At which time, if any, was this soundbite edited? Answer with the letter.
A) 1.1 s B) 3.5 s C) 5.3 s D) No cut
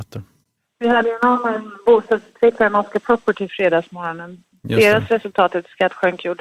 B